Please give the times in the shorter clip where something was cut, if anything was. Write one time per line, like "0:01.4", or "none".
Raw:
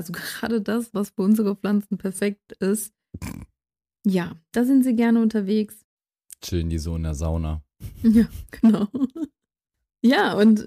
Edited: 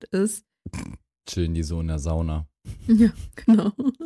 0:01.2